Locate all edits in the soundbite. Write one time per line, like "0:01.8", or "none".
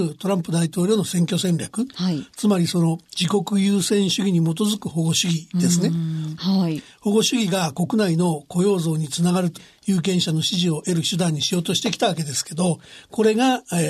0:06.4
0:09.6